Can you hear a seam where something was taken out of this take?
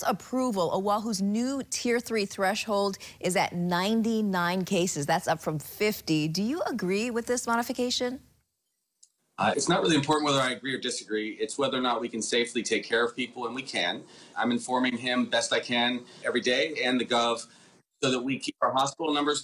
yes; 3 cuts; at 9.5 s, 14.3 s, 16.2 s

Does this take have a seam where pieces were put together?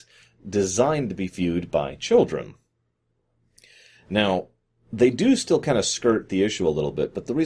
no; 0 cuts

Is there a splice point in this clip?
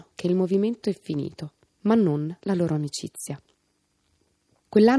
no; 0 cuts

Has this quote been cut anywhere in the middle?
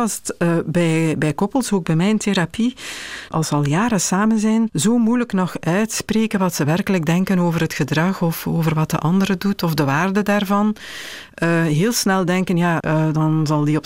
yes; 2 cuts; at 3.3 s, 12.8 s

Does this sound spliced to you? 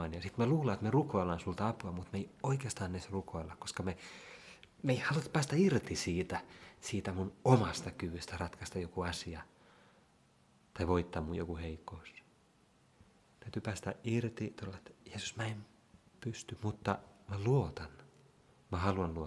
no; 0 cuts

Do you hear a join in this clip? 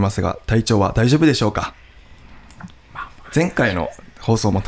yes; 1 cut; at 3.3 s

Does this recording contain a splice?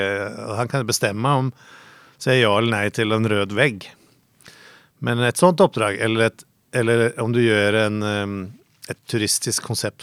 no; 0 cuts

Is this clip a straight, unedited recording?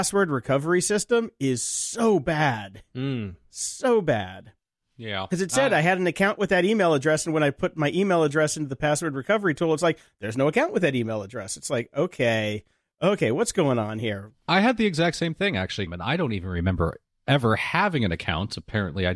no; 1 cut; at 15.9 s

